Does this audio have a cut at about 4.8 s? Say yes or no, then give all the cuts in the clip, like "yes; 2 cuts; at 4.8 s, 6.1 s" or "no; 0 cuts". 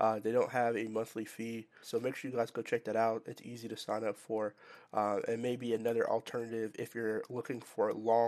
no; 1 cut; at 1.8 s